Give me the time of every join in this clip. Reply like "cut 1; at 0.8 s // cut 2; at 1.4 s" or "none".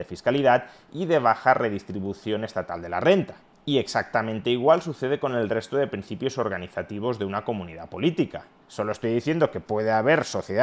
cut 1; at 3.5 s // cut 2; at 8.6 s